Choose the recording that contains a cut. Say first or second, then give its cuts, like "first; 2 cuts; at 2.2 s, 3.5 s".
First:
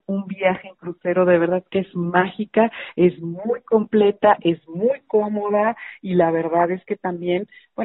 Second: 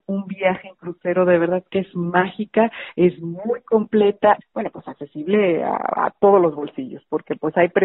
second; 1 cut; at 4.4 s